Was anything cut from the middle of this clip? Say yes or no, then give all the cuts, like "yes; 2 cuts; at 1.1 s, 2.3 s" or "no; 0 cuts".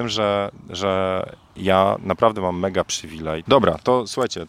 yes; 1 cut; at 3.5 s